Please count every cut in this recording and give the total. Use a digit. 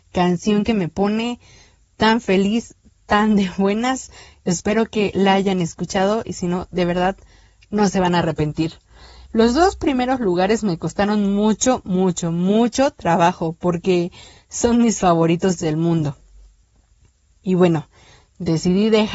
1